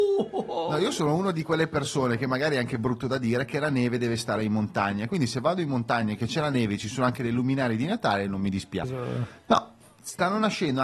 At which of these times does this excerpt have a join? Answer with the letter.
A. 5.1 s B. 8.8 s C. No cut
B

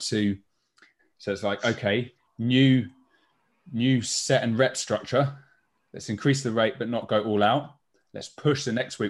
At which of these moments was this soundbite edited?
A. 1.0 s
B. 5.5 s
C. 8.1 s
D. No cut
A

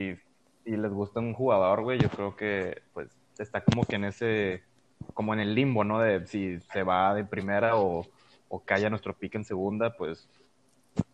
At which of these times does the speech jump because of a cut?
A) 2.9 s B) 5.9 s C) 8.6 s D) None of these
A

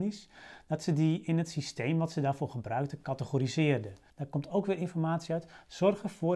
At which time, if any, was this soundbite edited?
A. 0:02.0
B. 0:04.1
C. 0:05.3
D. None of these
B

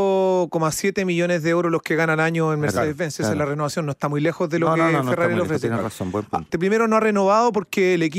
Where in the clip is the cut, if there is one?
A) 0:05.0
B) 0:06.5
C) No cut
B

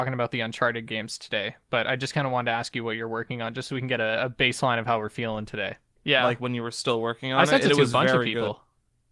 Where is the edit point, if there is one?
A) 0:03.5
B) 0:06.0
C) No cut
B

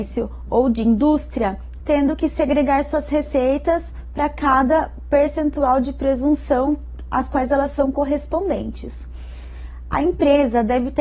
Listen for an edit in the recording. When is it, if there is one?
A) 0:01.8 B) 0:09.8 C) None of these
A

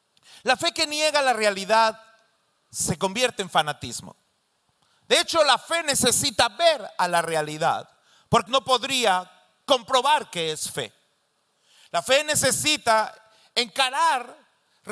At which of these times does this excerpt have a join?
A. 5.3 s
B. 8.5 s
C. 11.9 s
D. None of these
B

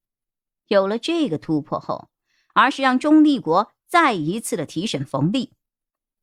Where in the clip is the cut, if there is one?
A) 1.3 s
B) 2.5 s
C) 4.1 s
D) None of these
B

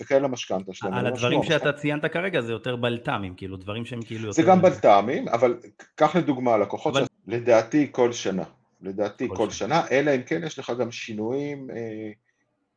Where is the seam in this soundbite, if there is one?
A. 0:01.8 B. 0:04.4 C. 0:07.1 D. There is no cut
C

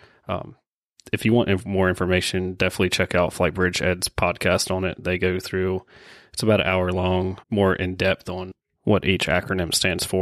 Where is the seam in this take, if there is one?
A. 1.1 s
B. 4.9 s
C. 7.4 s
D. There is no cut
C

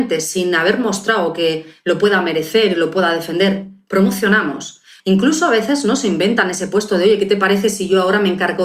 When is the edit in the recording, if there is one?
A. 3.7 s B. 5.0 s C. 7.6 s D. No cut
B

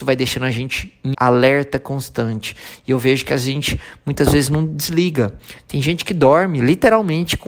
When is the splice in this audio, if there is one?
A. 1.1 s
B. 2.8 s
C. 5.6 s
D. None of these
A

